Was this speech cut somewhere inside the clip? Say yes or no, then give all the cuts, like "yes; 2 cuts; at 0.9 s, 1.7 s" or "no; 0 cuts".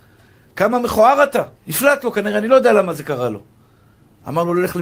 yes; 1 cut; at 1.6 s